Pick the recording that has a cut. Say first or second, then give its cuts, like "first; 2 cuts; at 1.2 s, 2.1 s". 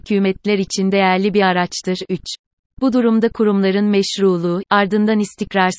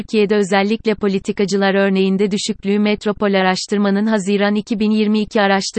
first; 2 cuts; at 2.7 s, 4.7 s